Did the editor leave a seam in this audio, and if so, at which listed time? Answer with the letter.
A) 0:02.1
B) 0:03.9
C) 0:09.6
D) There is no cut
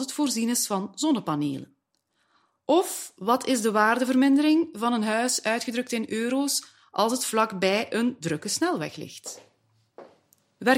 D